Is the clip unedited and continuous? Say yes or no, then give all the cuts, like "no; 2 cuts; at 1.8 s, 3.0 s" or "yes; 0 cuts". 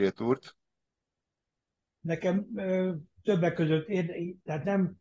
yes; 0 cuts